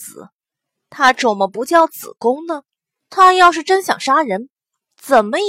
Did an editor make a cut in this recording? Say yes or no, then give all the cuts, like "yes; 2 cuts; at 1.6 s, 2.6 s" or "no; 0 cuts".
yes; 1 cut; at 3.0 s